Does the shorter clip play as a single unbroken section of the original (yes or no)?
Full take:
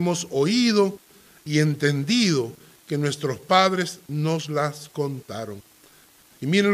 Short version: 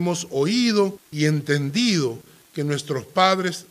no